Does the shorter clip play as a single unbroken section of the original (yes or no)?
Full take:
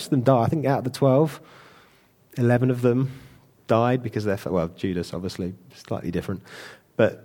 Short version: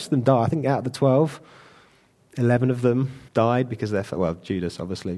no